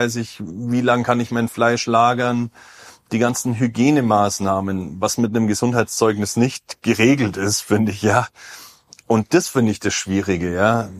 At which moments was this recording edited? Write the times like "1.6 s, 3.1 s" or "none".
none